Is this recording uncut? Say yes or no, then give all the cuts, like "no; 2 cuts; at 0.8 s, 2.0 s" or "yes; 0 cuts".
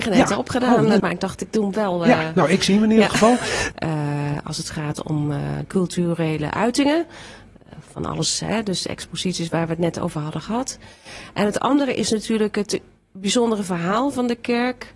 no; 3 cuts; at 1.0 s, 3.7 s, 5.6 s